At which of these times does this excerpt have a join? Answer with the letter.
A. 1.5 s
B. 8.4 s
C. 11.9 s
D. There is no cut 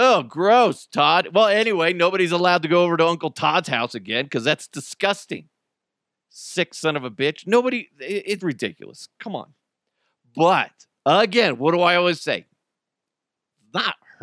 B